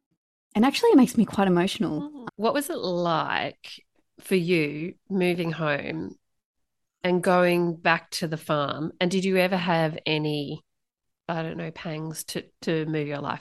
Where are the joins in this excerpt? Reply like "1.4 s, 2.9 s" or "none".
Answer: 2.3 s